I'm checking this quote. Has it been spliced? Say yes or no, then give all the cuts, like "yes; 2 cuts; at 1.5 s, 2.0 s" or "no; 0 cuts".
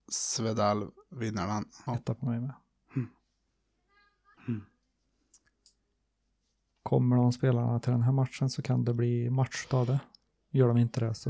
yes; 2 cuts; at 1.9 s, 4.4 s